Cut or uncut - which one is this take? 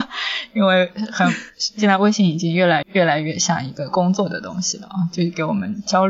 cut